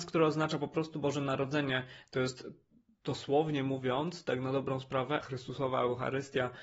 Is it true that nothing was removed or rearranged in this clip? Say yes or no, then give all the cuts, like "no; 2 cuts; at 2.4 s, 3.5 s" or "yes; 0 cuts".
no; 1 cut; at 5.2 s